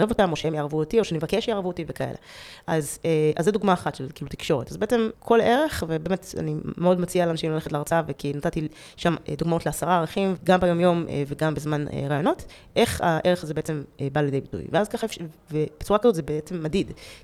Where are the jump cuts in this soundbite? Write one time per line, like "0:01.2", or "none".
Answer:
0:05.1
0:10.4